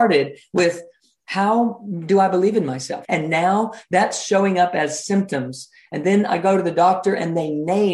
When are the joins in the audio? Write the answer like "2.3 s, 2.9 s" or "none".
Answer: 3.0 s